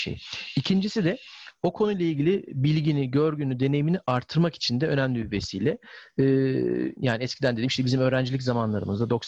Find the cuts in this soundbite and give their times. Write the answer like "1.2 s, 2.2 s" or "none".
7.0 s